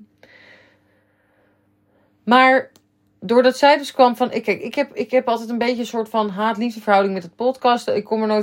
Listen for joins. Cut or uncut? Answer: uncut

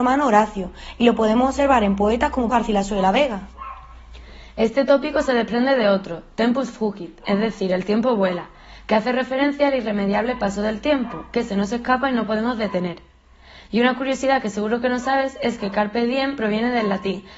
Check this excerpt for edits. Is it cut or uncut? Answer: cut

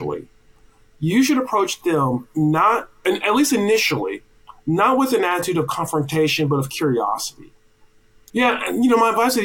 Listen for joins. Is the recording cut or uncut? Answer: cut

